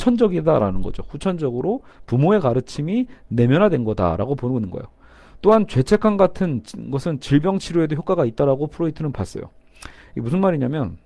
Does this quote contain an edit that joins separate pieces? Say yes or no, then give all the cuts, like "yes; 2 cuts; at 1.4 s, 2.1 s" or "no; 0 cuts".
no; 0 cuts